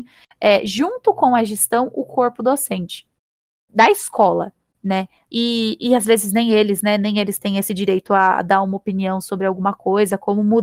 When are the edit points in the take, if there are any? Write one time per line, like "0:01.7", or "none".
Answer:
0:05.3